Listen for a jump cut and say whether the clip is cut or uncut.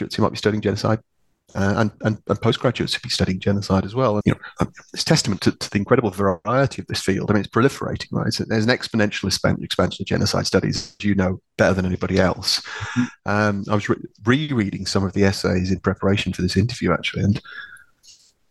cut